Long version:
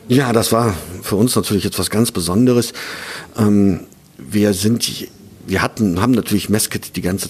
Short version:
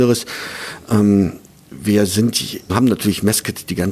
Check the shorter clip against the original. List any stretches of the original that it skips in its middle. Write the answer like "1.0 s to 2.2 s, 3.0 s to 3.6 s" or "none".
5.2 s to 6.0 s